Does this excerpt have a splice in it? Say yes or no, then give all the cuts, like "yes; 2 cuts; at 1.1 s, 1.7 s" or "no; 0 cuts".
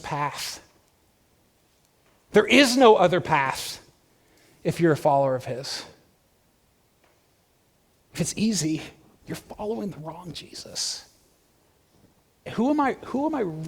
yes; 1 cut; at 12.5 s